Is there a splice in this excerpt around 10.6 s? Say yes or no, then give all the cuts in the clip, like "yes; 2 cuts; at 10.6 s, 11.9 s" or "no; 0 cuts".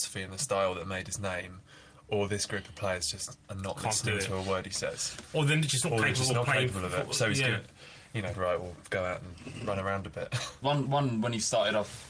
yes; 2 cuts; at 8.3 s, 10.6 s